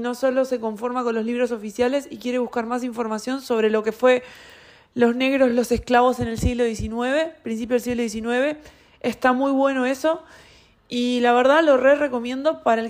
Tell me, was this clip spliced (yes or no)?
no